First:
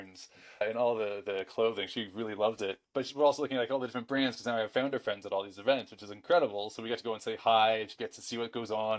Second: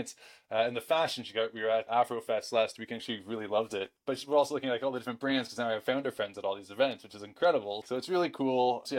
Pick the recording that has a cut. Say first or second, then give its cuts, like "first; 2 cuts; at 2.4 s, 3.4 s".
second; 3 cuts; at 1.9 s, 3.0 s, 7.8 s